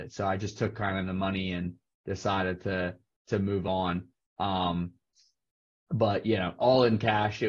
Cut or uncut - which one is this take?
uncut